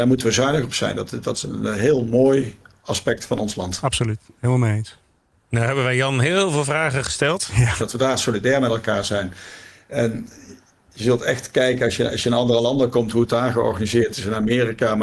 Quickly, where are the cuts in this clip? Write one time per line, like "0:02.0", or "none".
0:07.8